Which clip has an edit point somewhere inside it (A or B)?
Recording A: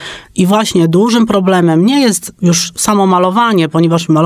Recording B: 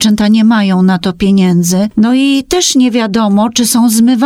B